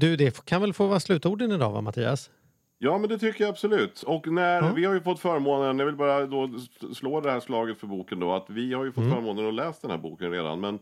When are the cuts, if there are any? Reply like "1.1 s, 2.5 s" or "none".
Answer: none